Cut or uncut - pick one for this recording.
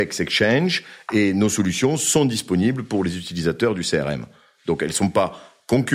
uncut